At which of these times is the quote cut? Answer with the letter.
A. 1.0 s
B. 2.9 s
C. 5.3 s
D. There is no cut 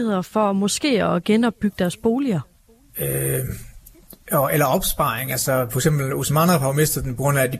B